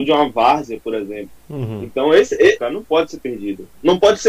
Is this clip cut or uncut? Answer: cut